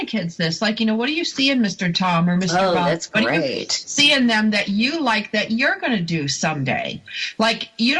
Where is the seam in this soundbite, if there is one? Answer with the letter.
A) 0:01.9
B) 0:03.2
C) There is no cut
A